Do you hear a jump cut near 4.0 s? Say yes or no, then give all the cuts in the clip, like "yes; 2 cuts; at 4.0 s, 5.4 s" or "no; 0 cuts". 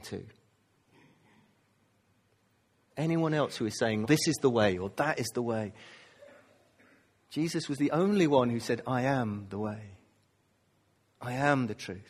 yes; 1 cut; at 4.0 s